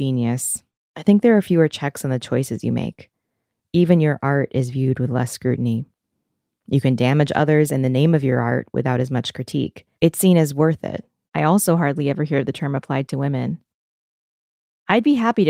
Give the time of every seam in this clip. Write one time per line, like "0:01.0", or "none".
0:09.9
0:11.3